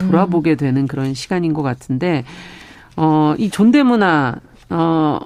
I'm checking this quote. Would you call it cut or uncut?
uncut